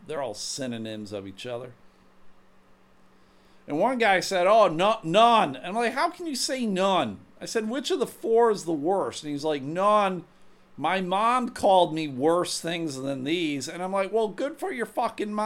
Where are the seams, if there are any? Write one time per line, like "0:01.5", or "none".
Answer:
none